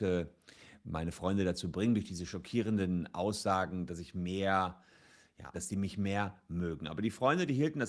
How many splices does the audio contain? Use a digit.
1